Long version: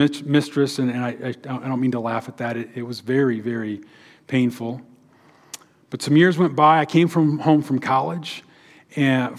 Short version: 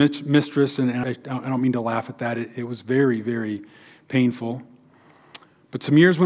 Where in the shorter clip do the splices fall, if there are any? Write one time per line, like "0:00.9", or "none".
0:01.0